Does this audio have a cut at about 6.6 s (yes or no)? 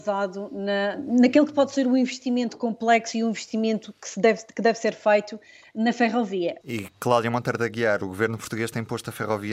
yes